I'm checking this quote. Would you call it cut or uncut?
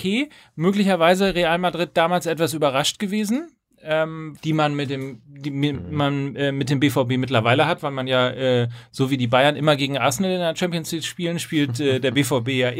cut